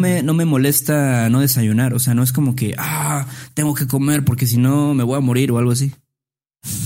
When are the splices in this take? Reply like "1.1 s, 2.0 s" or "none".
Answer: none